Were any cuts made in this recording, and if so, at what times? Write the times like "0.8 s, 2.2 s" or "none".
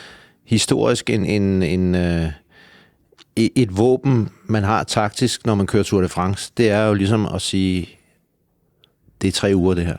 none